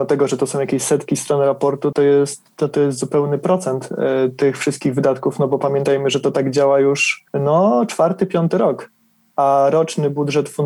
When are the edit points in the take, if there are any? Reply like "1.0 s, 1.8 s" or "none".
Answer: 1.9 s, 7.3 s